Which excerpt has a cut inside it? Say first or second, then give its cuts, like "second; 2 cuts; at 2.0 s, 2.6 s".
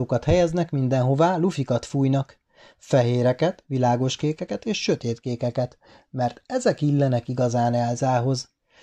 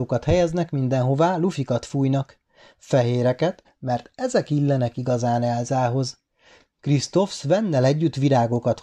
second; 1 cut; at 3.6 s